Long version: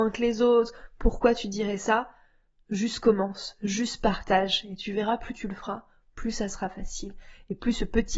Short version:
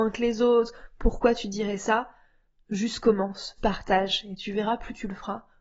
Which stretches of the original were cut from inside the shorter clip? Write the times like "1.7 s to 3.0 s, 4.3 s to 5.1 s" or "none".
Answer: 3.6 s to 4.0 s